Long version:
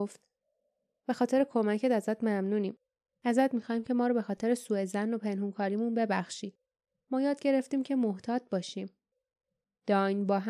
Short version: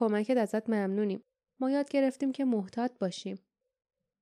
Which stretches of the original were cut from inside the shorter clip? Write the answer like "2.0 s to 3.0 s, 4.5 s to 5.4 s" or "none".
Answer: 3.0 s to 7.0 s